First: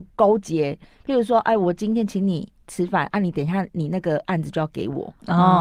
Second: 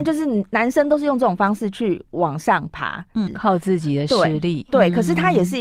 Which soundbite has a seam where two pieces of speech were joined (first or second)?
second